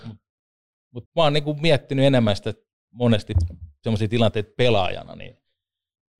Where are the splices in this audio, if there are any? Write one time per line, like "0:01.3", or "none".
0:01.1